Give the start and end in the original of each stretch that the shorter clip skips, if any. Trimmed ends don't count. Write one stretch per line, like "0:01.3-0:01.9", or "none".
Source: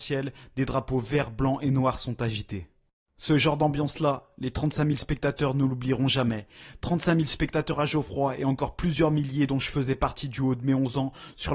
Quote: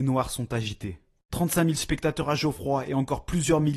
0:03.0-0:06.8